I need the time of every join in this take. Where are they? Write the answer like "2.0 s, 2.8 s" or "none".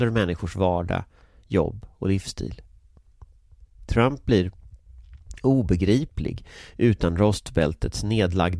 none